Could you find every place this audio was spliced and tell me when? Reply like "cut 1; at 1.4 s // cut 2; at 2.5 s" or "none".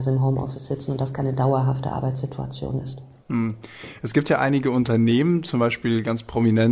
none